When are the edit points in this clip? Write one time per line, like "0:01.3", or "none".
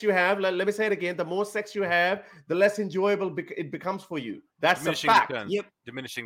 0:04.5